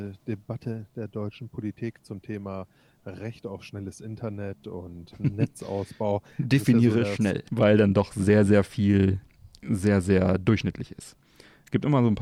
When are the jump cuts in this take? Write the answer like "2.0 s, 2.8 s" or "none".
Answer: 5.1 s, 7.5 s